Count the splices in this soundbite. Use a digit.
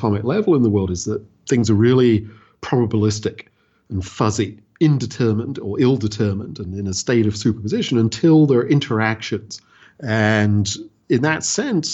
1